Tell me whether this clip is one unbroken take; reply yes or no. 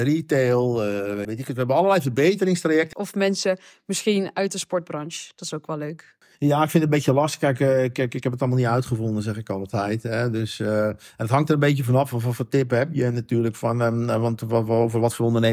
no